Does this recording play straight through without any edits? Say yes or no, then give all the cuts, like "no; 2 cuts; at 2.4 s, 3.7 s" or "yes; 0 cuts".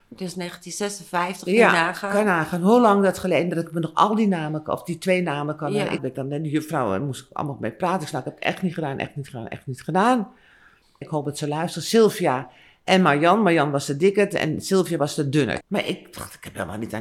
no; 3 cuts; at 6.0 s, 11.0 s, 15.6 s